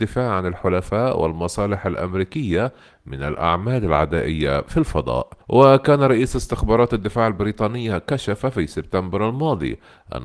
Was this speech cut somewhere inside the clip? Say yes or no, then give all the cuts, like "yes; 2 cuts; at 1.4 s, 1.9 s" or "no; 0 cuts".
yes; 1 cut; at 5.4 s